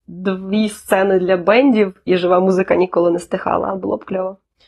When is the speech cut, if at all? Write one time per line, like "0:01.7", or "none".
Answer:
0:02.1

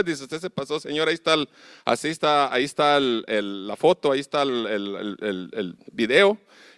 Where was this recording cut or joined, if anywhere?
none

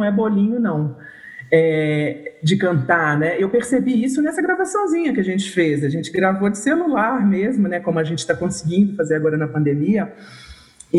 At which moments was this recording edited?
none

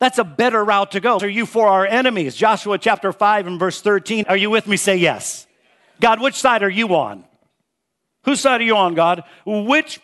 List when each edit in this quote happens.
0:01.2
0:04.2

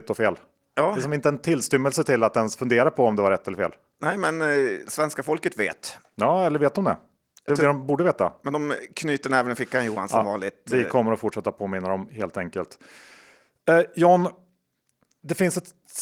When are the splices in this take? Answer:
none

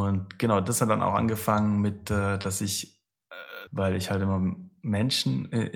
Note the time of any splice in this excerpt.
0:03.7

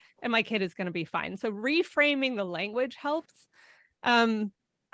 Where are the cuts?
none

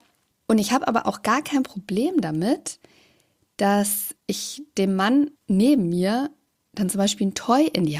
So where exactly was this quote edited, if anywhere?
0:04.2
0:05.4

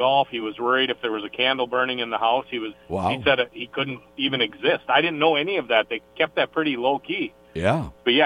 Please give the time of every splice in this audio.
0:02.7

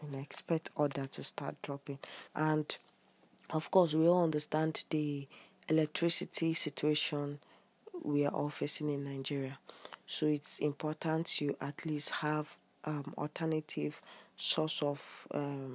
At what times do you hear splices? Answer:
0:02.3

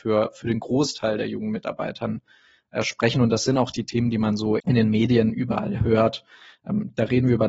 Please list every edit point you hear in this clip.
0:04.6

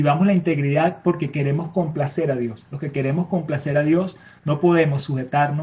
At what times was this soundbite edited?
none

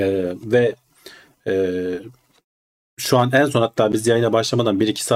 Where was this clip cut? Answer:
none

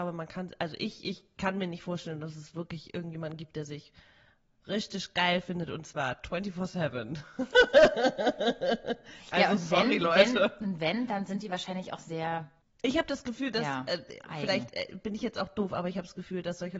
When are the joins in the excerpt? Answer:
none

